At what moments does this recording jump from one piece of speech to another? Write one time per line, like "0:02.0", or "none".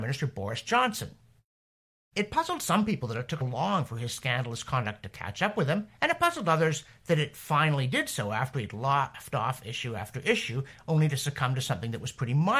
0:03.4

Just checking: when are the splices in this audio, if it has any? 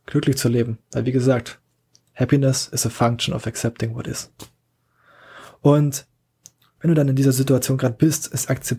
none

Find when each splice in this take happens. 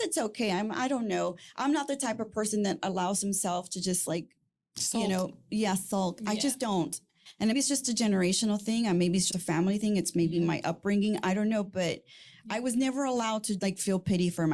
0:07.5
0:09.3
0:13.6

